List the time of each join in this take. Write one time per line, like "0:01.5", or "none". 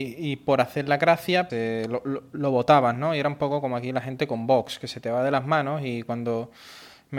0:01.5